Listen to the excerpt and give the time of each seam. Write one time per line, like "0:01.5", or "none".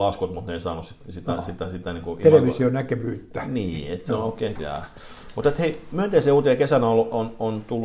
0:04.6